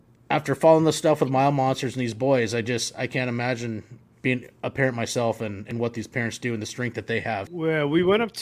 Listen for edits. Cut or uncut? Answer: cut